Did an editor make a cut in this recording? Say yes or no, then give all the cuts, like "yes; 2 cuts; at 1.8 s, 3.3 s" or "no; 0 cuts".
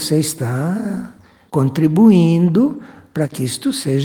yes; 1 cut; at 1.5 s